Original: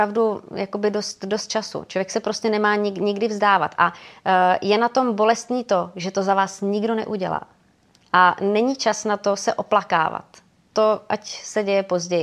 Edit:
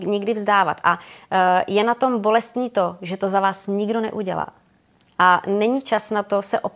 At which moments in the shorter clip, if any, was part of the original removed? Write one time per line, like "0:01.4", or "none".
none

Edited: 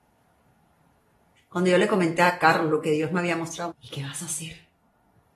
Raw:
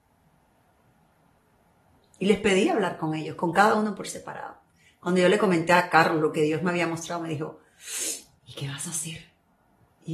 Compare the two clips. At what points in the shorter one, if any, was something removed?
0:01.4
0:03.7

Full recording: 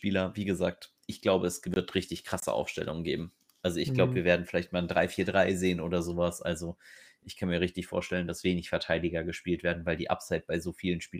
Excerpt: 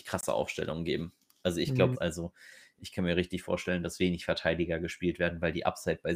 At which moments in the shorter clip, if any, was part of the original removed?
0:01.9

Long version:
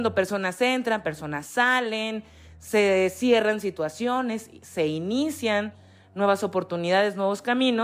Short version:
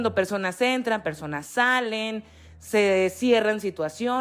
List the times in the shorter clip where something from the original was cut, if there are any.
none

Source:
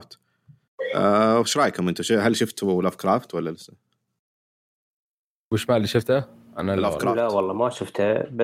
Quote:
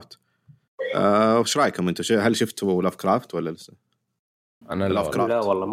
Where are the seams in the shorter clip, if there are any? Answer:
0:04.6

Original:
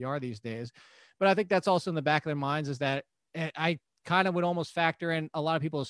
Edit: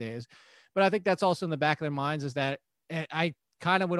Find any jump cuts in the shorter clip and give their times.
none

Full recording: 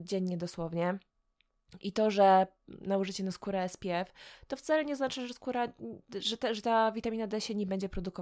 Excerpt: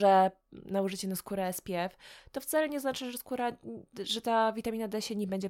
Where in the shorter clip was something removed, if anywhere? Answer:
0:04.2

